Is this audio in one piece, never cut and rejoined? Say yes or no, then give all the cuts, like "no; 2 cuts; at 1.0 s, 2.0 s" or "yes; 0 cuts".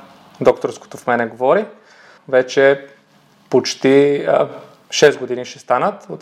no; 1 cut; at 2.2 s